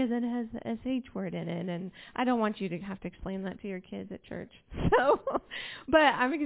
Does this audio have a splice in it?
no; 0 cuts

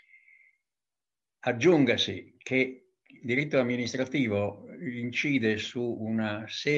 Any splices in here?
no; 0 cuts

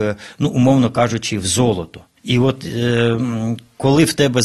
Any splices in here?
yes; 1 cut; at 2.2 s

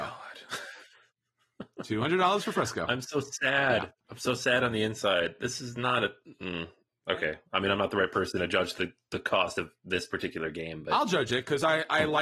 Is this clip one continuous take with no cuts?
yes; 0 cuts

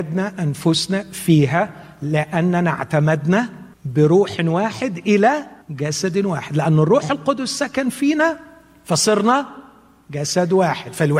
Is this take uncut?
no; 2 cuts; at 3.7 s, 5.6 s

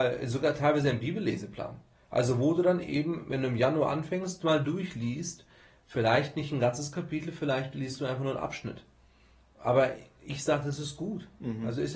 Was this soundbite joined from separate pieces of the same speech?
no; 0 cuts

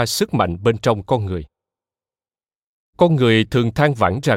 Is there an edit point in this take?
no; 0 cuts

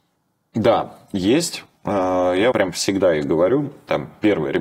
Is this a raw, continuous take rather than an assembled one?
no; 1 cut; at 2.5 s

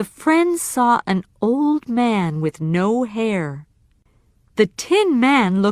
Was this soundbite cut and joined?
no; 0 cuts

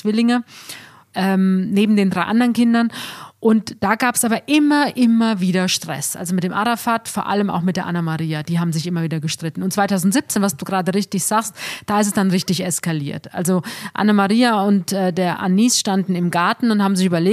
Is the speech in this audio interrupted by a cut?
no; 0 cuts

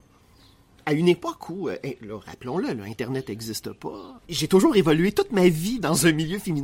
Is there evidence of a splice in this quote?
yes; 1 cut; at 4.2 s

